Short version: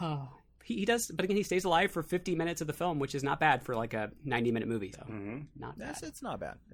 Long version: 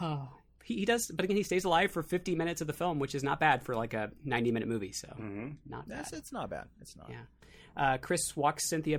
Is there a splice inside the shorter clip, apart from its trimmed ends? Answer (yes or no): yes